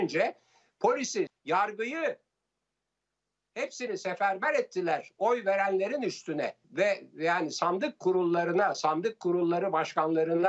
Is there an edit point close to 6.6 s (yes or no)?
yes